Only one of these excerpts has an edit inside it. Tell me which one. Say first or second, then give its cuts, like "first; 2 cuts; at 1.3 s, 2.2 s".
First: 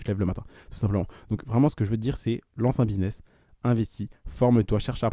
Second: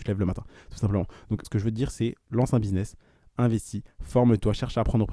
second; 1 cut; at 1.4 s